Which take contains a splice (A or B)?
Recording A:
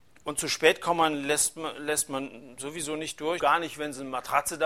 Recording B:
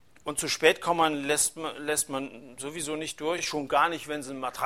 A